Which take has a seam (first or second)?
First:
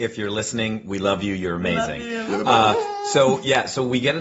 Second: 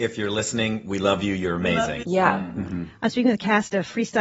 second